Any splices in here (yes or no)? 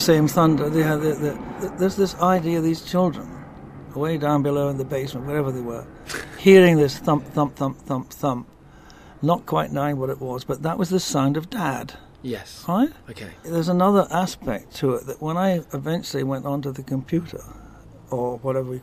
yes